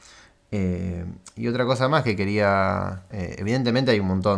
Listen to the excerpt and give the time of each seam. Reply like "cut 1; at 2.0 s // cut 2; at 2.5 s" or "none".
cut 1; at 3.1 s